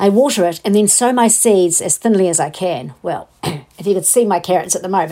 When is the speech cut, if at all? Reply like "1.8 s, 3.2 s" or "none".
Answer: none